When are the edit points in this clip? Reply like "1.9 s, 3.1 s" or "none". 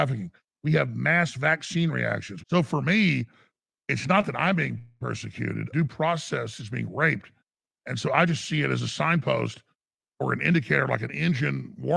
2.4 s, 5.7 s